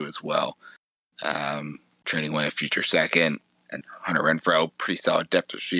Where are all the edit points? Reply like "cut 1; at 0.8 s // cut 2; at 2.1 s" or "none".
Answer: cut 1; at 3.8 s